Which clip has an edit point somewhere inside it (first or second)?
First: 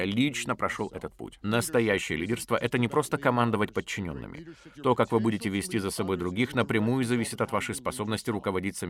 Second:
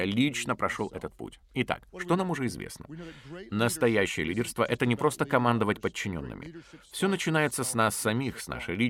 first